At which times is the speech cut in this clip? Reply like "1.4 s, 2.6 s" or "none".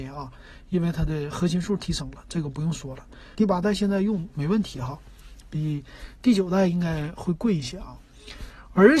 3.4 s